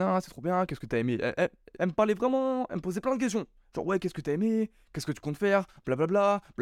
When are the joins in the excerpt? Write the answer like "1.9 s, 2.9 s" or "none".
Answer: 1.8 s